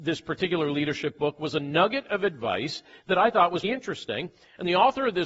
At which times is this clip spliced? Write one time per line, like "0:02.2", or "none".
0:03.6